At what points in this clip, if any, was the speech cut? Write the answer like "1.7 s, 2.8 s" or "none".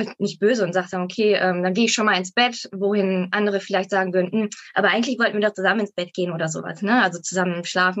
none